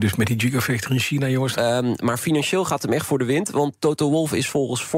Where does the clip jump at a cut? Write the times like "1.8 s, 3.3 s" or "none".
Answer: 1.5 s